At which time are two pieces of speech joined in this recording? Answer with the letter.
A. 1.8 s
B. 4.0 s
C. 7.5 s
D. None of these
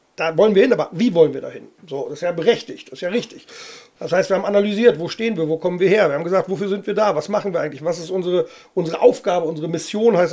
B